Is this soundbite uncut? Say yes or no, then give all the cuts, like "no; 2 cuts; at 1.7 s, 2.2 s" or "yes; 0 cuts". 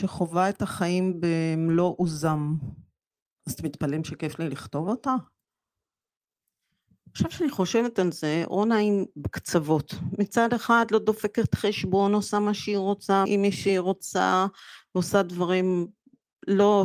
no; 1 cut; at 13.3 s